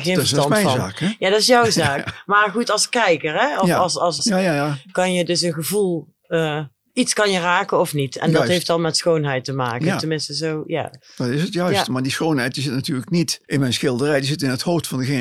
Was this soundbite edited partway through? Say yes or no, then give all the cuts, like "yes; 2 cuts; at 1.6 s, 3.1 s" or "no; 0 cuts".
yes; 2 cuts; at 4.2 s, 13.4 s